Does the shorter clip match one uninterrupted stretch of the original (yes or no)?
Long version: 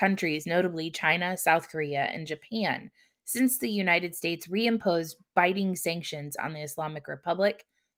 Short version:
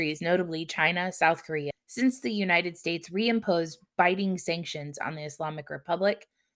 no